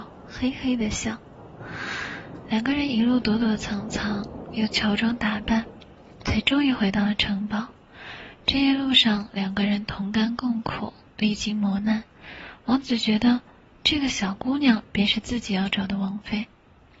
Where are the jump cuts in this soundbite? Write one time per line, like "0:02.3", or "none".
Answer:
none